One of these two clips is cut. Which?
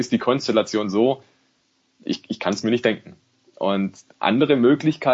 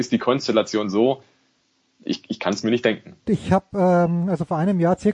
second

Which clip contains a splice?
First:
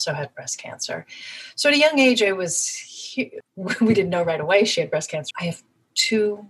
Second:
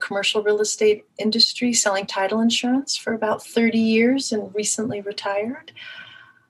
first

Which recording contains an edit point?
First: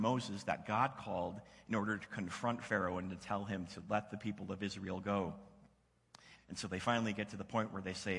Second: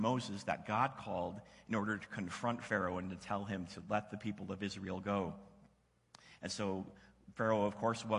first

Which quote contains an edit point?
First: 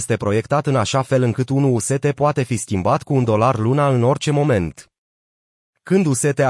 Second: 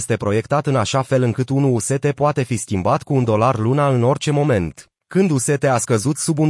second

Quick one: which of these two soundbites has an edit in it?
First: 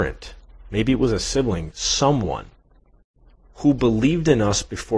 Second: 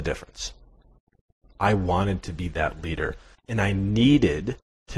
second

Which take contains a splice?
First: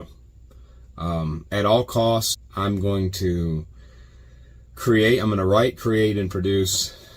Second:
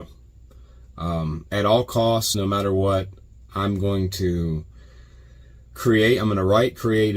first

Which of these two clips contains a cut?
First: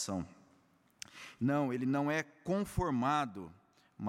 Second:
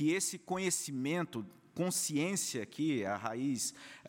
first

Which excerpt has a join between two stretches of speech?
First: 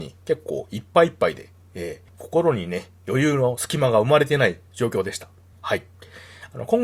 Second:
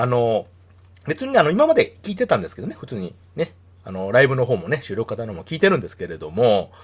first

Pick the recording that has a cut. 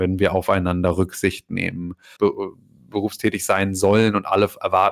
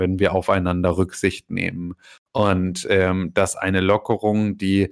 first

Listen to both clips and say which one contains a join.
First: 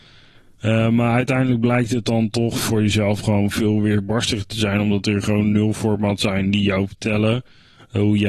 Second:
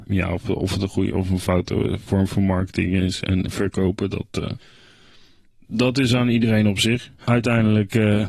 second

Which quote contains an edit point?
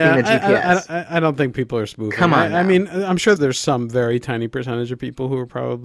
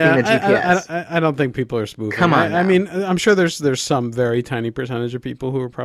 first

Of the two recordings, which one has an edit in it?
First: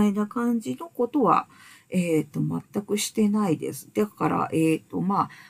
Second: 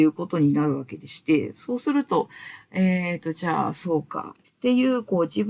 second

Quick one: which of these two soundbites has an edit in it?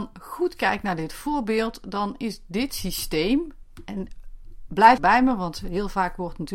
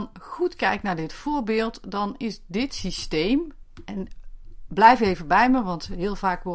first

